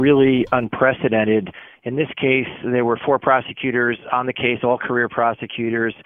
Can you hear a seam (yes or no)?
no